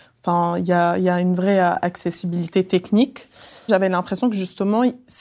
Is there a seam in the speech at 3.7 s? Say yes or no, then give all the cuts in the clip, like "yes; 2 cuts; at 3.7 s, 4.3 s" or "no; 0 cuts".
yes; 1 cut; at 3.7 s